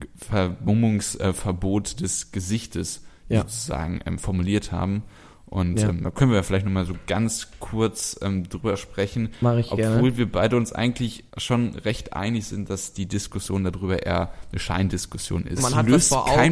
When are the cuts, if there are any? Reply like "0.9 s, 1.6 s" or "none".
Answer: 11.3 s, 15.6 s